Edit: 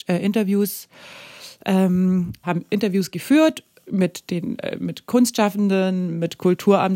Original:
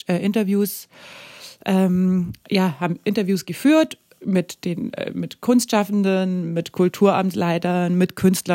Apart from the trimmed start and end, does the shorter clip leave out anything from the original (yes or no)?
yes